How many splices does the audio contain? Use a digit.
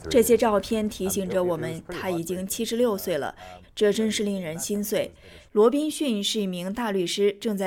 2